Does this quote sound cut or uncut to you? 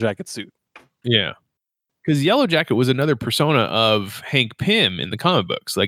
cut